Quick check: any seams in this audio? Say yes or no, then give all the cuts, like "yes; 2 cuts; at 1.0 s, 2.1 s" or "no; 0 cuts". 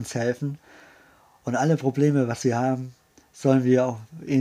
no; 0 cuts